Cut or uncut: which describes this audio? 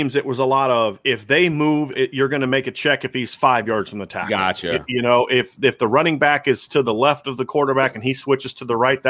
cut